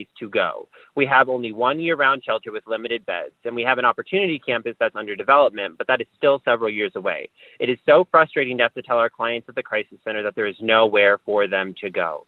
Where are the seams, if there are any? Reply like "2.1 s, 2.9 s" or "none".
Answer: none